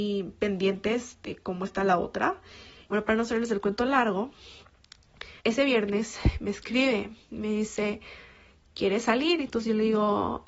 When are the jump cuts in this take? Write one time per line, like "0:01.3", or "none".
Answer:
0:02.9
0:05.4